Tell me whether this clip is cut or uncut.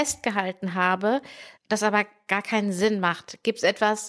cut